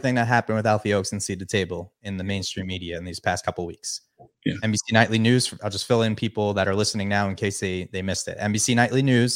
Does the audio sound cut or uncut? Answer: uncut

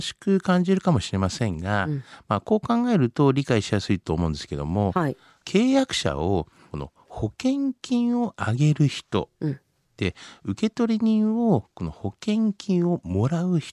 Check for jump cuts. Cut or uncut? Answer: uncut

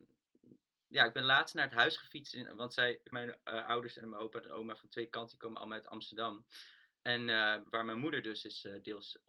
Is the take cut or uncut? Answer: cut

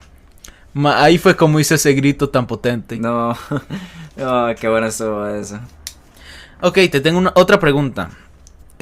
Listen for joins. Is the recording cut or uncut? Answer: uncut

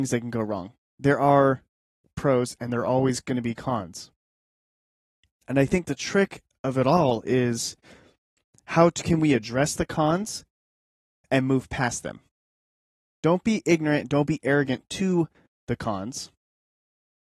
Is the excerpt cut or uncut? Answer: uncut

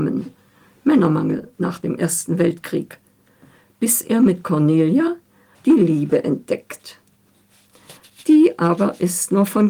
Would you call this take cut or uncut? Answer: cut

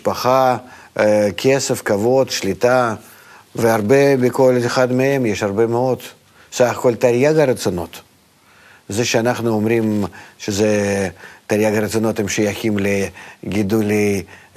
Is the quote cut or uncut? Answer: cut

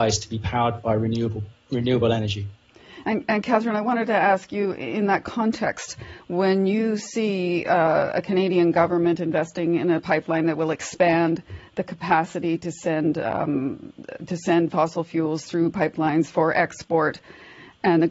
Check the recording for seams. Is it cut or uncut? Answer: cut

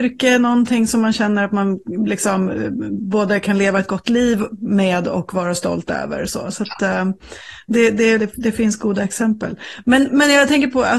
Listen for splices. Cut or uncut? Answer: cut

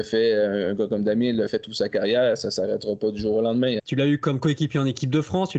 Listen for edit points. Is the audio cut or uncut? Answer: cut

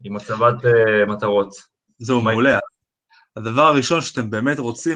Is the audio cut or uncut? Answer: uncut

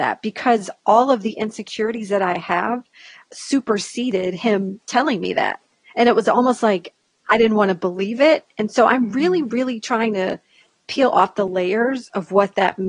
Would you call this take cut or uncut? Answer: uncut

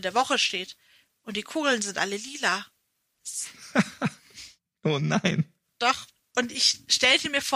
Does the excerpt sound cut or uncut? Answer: uncut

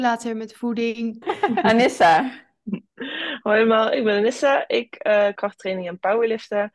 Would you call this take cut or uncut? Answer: cut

